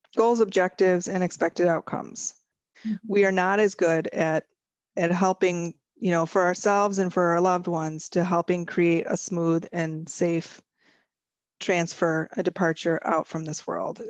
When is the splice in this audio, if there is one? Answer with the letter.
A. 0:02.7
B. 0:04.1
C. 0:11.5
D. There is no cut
A